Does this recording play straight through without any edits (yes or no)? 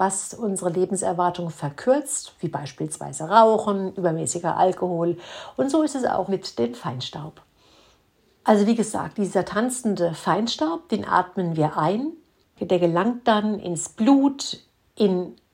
no